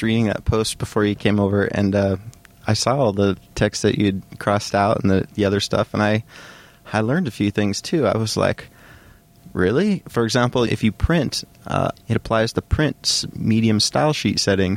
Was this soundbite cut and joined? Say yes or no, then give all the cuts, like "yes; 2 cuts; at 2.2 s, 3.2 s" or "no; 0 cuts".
yes; 2 cuts; at 10.7 s, 12.0 s